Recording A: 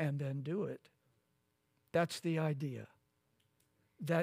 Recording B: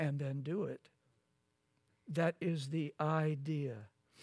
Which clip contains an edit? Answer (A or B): B